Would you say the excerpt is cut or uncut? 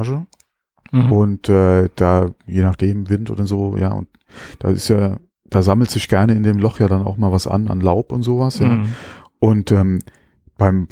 uncut